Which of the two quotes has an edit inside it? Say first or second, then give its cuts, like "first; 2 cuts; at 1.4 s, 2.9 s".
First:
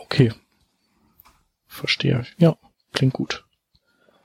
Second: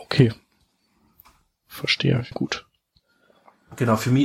second; 1 cut; at 2.3 s